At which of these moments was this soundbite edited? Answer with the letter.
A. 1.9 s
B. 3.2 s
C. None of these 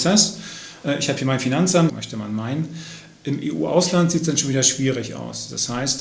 A